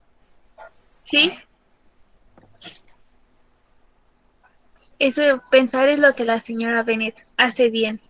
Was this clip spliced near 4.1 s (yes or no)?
no